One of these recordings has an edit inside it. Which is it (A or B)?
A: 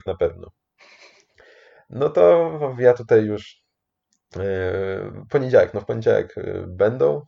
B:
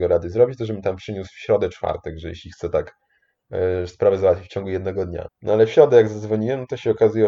B